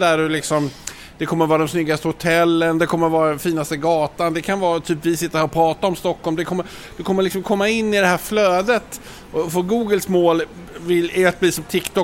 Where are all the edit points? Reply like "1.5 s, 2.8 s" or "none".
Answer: none